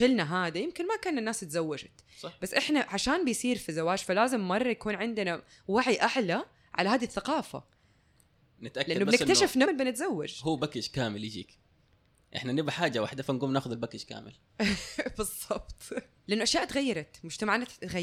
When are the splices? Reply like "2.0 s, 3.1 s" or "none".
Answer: 9.7 s